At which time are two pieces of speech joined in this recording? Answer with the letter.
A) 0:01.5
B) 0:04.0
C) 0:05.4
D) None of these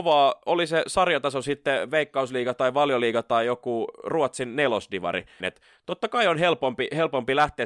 C